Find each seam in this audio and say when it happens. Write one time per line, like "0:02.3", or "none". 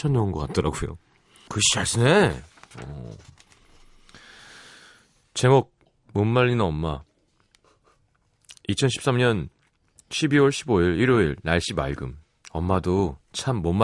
0:01.5